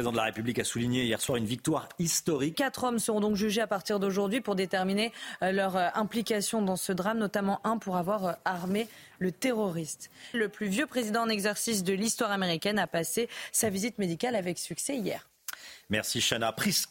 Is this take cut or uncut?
cut